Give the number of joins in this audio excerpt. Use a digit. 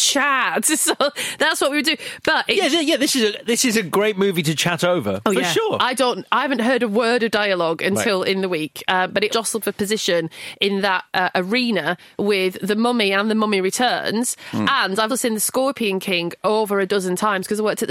2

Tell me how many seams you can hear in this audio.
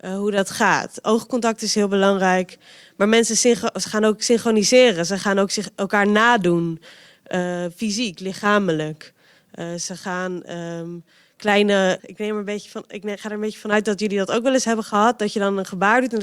1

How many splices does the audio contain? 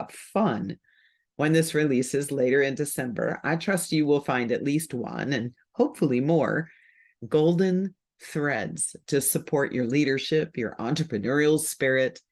0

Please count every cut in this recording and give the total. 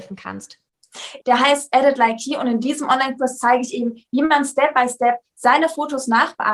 1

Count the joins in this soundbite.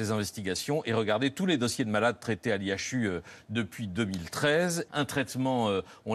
1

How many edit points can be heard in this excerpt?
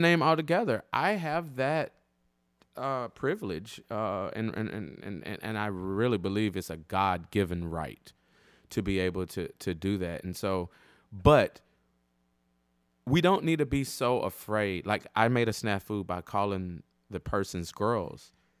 0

